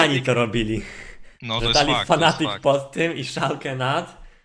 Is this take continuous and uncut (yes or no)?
yes